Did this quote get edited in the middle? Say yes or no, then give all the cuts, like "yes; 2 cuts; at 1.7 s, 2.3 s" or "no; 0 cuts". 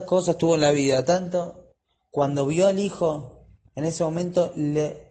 no; 0 cuts